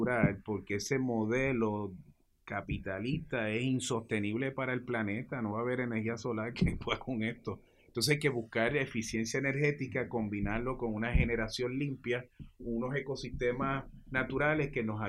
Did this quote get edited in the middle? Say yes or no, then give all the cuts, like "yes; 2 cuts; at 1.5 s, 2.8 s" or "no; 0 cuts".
yes; 1 cut; at 12.6 s